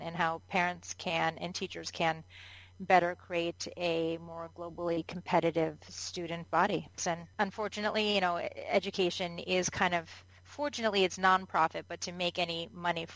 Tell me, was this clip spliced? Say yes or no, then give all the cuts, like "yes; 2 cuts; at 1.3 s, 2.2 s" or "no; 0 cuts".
yes; 1 cut; at 7.0 s